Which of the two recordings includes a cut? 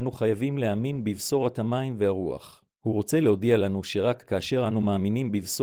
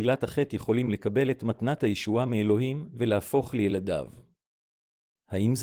first; 1 cut; at 2.7 s

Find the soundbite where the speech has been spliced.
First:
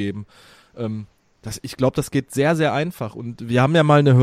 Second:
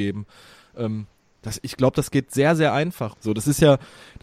second; 1 cut; at 3.1 s

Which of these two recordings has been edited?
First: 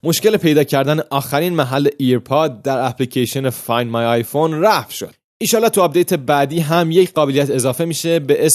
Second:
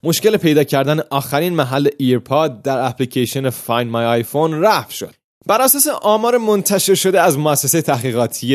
second; 1 cut; at 5.3 s

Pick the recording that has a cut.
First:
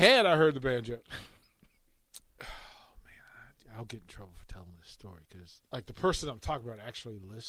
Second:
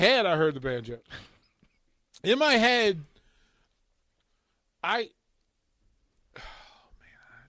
first; 2 cuts; at 2.2 s, 5.7 s

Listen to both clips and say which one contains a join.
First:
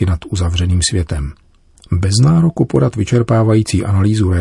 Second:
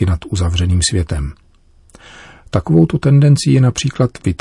first; 1 cut; at 1.8 s

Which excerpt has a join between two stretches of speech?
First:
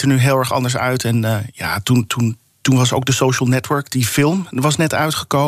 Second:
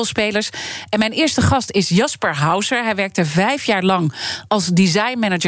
first; 1 cut; at 2.1 s

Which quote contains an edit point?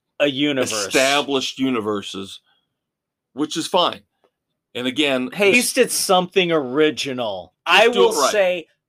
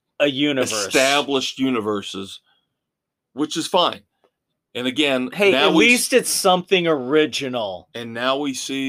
first; 2 cuts; at 5.5 s, 7.5 s

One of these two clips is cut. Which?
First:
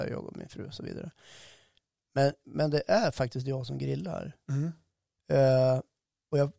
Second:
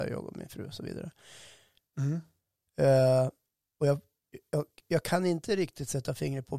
second; 1 cut; at 1.9 s

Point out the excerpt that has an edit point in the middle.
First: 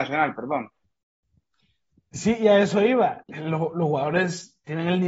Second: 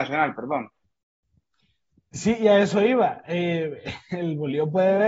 first; 1 cut; at 3.2 s

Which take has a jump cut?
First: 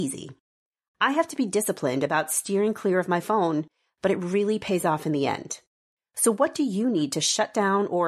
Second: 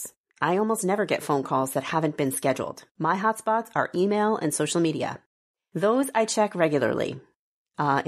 second; 1 cut; at 2.9 s

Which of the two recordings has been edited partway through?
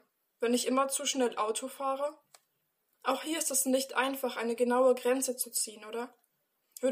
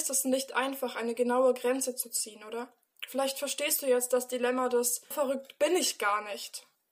second; 2 cuts; at 2.9 s, 5.1 s

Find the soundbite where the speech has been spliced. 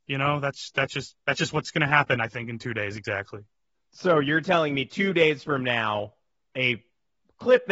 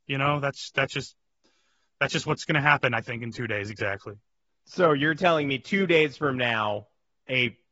first; 1 cut; at 1.2 s

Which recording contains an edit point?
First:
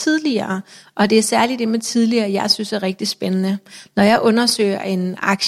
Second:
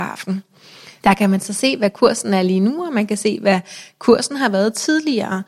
second; 1 cut; at 1.0 s

